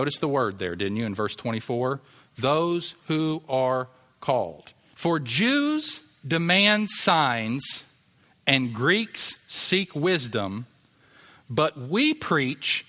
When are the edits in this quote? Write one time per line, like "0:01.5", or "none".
0:04.9